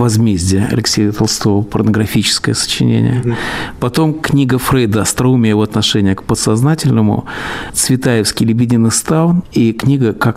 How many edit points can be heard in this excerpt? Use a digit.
1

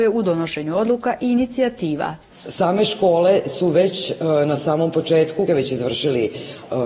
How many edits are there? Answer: 1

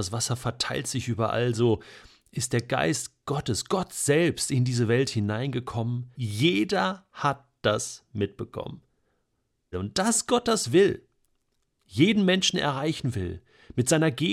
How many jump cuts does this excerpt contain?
2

